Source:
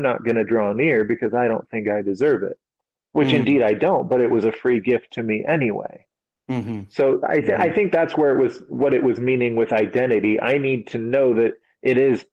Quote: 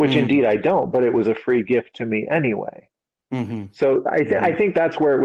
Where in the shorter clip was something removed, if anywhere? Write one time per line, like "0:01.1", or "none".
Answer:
none